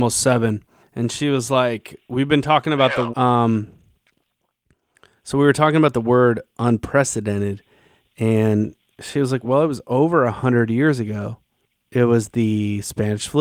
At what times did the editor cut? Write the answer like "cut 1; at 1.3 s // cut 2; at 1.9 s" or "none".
cut 1; at 3.1 s // cut 2; at 9.4 s